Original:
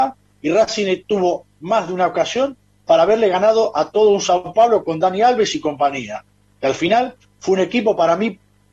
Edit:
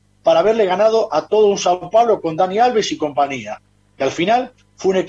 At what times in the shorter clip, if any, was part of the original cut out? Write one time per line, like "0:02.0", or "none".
none